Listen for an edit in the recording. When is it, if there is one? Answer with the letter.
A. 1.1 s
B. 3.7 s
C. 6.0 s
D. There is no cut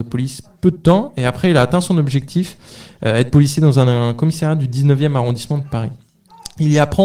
D